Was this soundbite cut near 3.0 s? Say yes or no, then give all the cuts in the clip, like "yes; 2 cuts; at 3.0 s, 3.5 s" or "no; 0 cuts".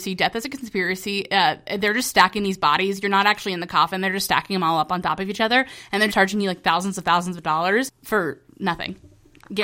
no; 1 cut; at 6.1 s